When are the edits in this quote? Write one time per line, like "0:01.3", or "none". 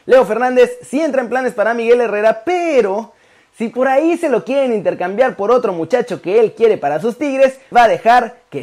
0:07.7